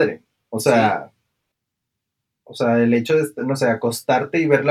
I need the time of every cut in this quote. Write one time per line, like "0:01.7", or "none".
none